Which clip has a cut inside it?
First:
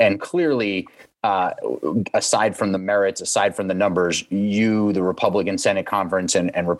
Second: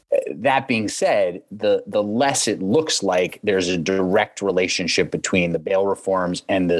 second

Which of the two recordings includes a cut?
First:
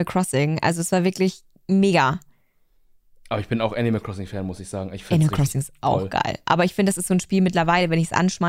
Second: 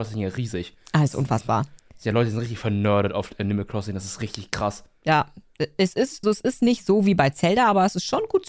second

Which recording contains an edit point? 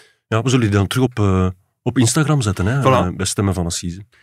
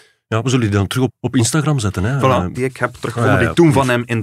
second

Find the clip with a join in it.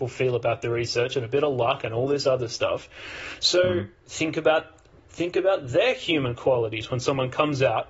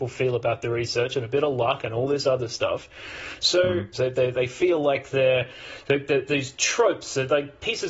second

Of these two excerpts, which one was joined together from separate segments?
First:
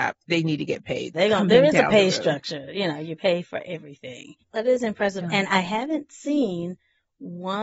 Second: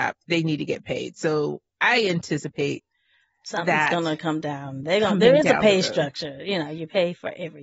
first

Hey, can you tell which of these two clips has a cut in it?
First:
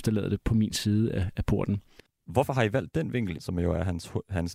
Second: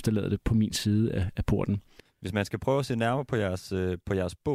first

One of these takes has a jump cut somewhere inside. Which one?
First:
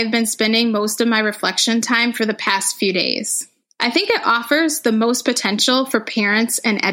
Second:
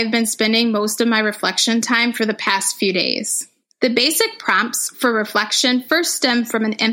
second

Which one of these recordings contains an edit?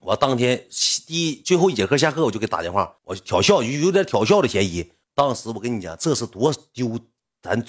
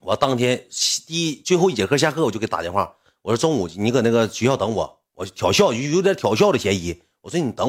first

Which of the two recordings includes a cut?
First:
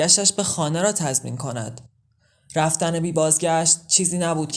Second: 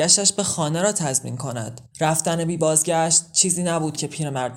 second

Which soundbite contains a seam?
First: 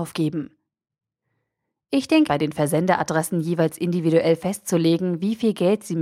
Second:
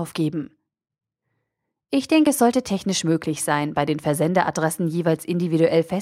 first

